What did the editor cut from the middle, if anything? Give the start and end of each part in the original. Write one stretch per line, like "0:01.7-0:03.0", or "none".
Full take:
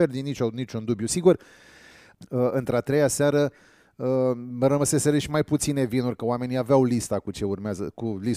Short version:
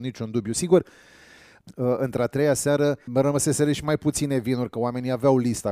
0:03.6-0:04.5